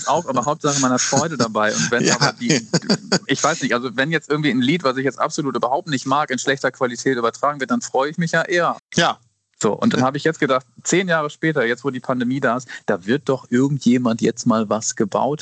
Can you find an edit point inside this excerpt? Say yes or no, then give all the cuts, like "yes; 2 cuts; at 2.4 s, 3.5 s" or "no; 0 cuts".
yes; 1 cut; at 8.8 s